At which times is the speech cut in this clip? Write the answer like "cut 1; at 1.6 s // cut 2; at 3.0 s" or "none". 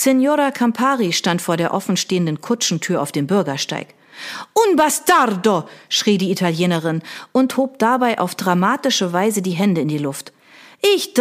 none